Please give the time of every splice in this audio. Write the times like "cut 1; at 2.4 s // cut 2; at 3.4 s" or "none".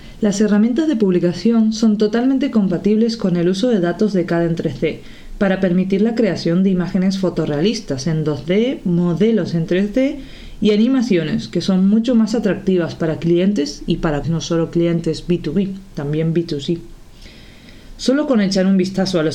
cut 1; at 14.2 s